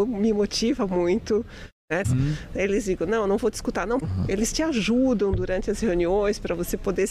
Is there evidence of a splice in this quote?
yes; 2 cuts; at 2.0 s, 4.0 s

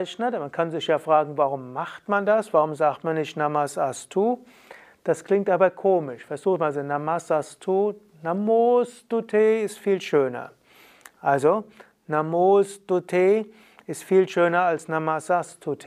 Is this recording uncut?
yes; 0 cuts

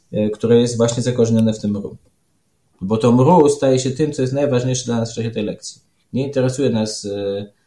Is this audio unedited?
yes; 0 cuts

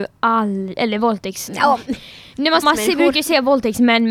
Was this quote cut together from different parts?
yes; 2 cuts; at 1.5 s, 2.6 s

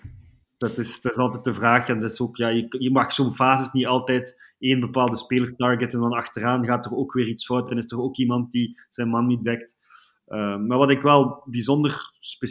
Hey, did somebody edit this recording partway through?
no; 0 cuts

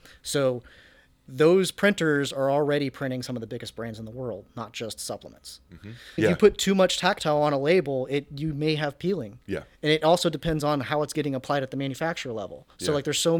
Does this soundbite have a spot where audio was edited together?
yes; 1 cut; at 6.2 s

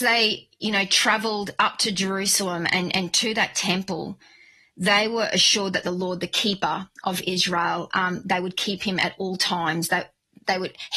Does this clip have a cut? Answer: no; 0 cuts

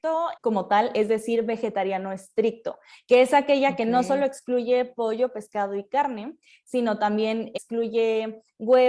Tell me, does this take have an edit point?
no; 0 cuts

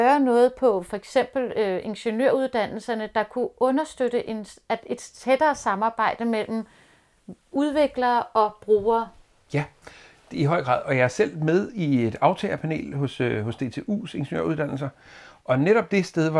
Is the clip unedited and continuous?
yes; 0 cuts

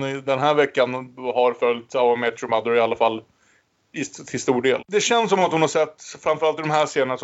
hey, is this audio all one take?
no; 1 cut; at 4.8 s

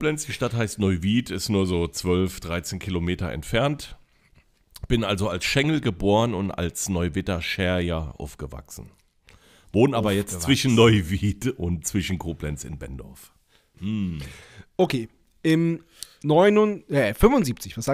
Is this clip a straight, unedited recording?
no; 1 cut; at 13.7 s

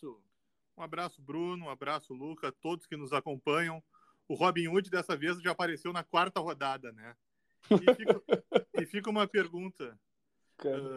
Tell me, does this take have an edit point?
no; 0 cuts

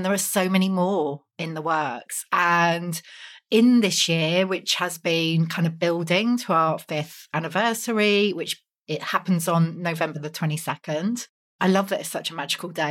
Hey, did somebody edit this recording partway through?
no; 0 cuts

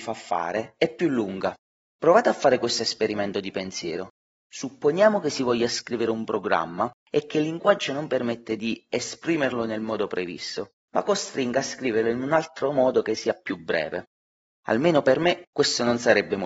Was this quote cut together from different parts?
no; 0 cuts

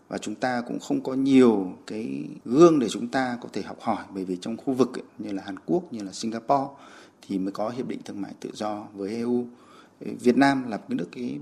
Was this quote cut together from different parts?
yes; 1 cut; at 5.1 s

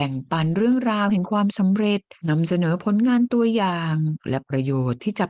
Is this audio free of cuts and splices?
no; 1 cut; at 2.2 s

